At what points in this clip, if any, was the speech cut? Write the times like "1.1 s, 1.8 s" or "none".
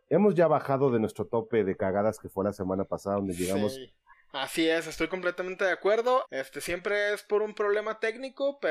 4.1 s, 6.2 s